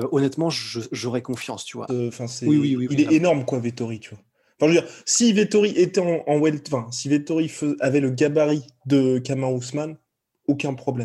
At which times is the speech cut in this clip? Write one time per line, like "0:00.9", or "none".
0:01.9